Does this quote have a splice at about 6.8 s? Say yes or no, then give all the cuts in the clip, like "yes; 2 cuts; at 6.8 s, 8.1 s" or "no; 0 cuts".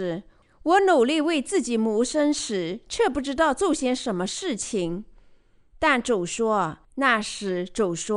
yes; 1 cut; at 6.8 s